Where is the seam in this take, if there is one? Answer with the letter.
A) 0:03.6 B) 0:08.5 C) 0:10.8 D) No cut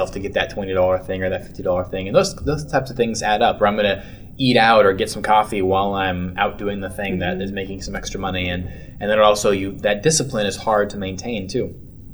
D